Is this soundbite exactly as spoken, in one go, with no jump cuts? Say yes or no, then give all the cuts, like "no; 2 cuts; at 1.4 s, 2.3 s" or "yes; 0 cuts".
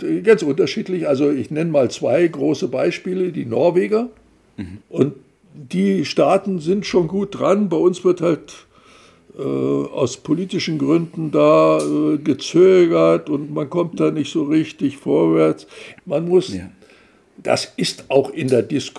no; 3 cuts; at 4.8 s, 16.0 s, 17.4 s